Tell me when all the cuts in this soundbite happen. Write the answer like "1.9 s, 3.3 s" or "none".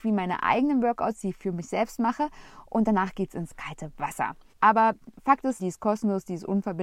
4.5 s, 5.6 s